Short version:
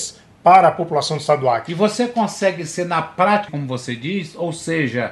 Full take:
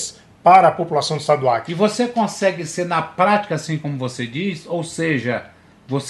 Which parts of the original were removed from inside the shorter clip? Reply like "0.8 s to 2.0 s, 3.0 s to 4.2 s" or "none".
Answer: 3.5 s to 3.8 s